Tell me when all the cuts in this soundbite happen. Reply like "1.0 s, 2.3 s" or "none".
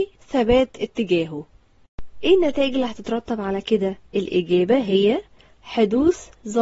4.1 s